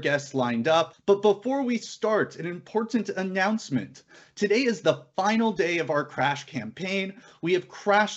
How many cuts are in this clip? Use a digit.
1